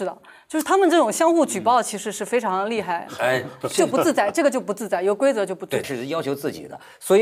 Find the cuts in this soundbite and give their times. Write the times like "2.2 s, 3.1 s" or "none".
3.6 s, 5.8 s